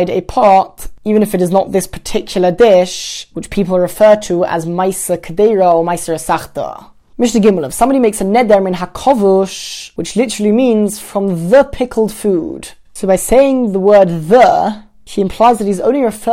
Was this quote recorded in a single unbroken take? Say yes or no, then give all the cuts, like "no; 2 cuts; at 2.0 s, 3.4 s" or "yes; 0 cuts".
no; 1 cut; at 12.8 s